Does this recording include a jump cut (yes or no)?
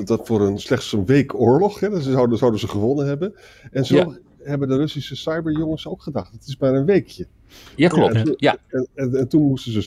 no